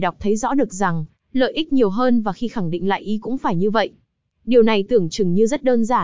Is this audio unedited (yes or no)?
yes